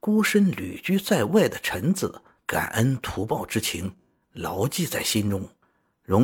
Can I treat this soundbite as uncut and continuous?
no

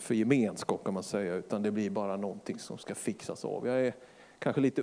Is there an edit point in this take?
no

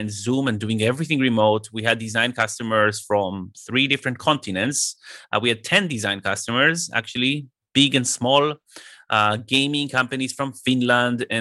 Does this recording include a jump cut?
no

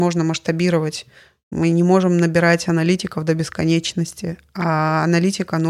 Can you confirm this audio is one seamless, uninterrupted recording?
yes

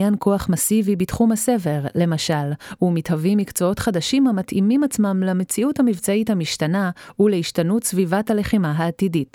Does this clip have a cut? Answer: no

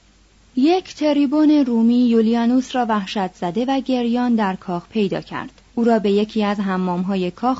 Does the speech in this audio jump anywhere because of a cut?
yes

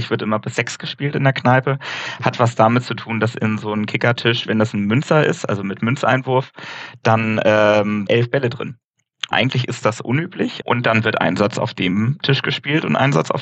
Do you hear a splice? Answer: yes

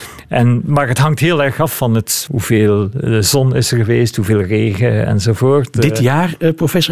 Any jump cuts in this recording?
yes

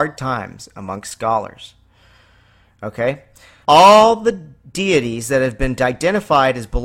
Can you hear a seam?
yes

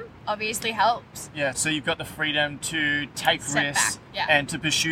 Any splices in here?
yes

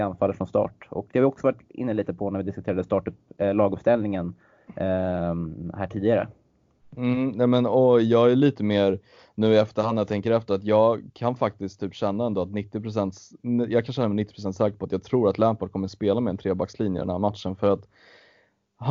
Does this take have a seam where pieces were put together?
no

